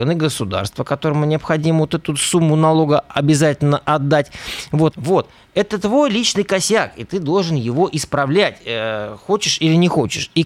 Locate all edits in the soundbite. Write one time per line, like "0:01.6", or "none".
0:04.9